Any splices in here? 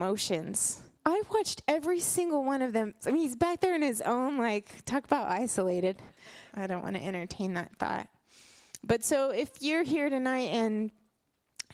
yes; 3 cuts; at 0.9 s, 3.0 s, 6.5 s

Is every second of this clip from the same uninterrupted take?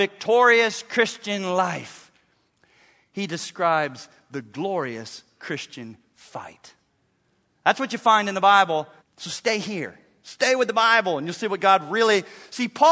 no; 1 cut; at 9.0 s

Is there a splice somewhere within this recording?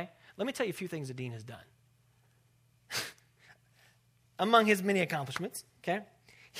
no; 0 cuts

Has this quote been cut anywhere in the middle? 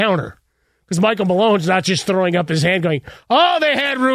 no; 0 cuts

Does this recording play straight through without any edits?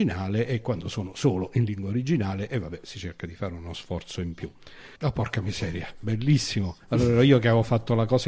no; 1 cut; at 5.0 s

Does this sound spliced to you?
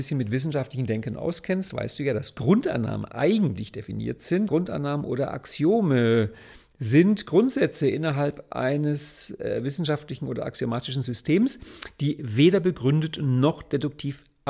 yes; 1 cut; at 4.5 s

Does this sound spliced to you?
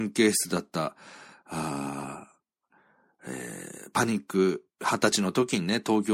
no; 0 cuts

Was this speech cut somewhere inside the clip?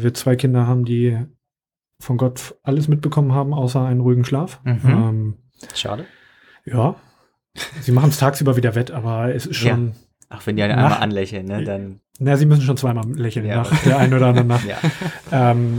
no; 0 cuts

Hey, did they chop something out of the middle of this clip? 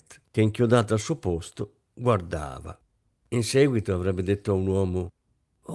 yes; 1 cut; at 3.1 s

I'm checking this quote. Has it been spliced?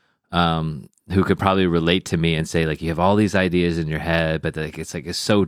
no; 0 cuts

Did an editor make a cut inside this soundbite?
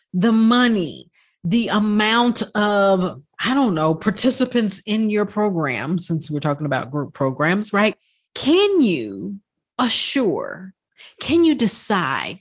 yes; 1 cut; at 8.3 s

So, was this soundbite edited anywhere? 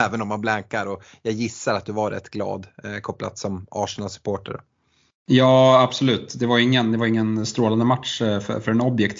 no; 0 cuts

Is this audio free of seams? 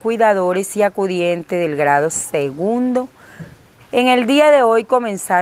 no; 1 cut; at 3.8 s

